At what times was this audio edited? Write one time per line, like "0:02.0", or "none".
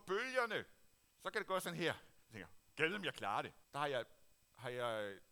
0:01.1
0:03.6